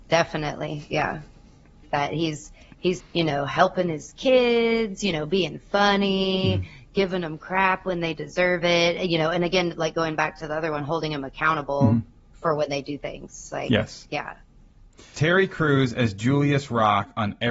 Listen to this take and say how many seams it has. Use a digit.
1